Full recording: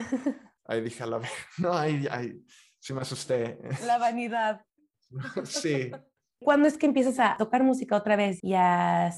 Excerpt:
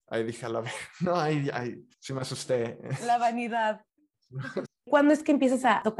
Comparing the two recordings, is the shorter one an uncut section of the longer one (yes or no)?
no